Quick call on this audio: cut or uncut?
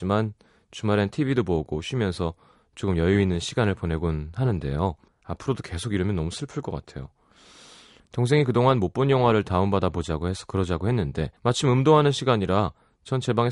cut